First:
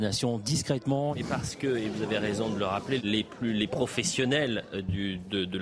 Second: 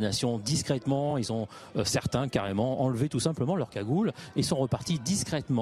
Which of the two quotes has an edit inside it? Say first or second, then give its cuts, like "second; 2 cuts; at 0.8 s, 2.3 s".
first; 2 cuts; at 1.1 s, 3.0 s